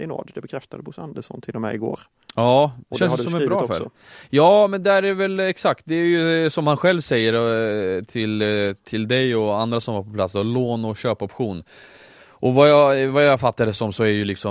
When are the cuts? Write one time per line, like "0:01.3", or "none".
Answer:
none